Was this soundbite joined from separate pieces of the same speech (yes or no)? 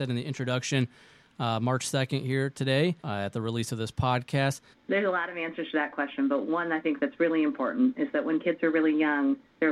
yes